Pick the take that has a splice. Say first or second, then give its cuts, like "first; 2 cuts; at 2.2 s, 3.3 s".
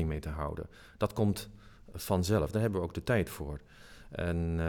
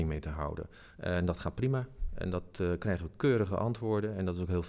second; 1 cut; at 0.9 s